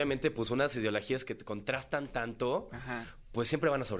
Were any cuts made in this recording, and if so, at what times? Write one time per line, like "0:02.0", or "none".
none